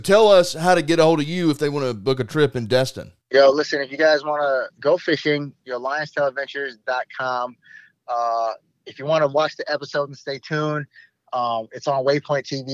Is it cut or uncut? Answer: cut